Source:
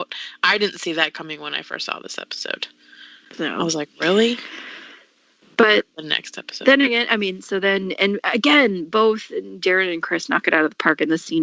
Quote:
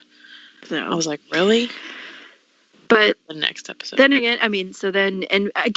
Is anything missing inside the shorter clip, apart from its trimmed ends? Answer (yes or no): no